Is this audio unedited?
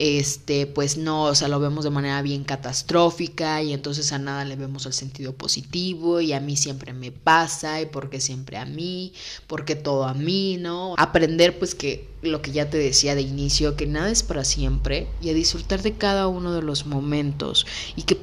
no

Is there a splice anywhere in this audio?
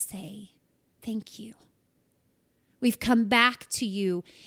no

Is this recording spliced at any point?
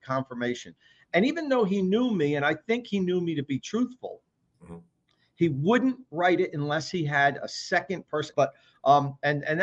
yes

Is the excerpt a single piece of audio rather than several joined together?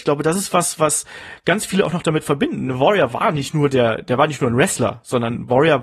yes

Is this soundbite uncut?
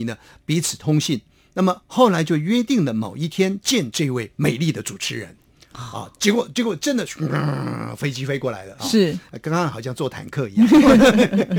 no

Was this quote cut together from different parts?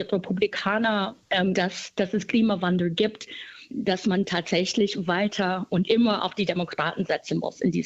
yes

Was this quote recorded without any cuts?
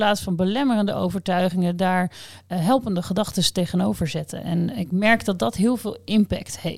yes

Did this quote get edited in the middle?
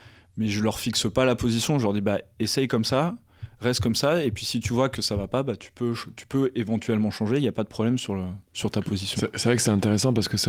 no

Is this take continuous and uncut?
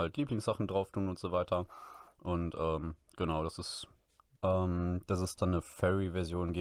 no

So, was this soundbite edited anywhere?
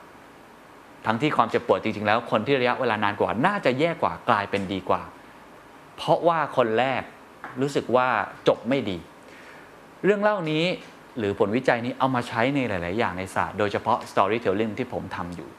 no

